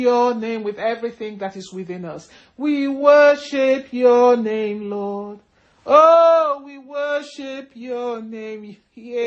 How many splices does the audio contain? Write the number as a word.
zero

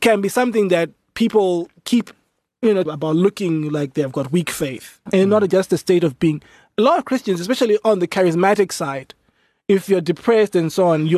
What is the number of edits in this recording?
two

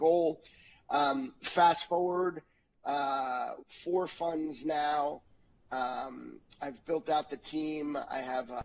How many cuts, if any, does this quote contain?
one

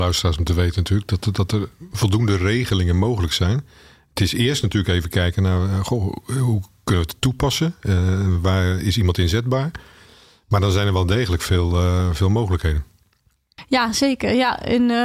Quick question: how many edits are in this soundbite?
zero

